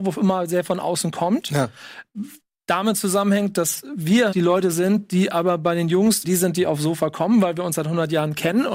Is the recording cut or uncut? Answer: cut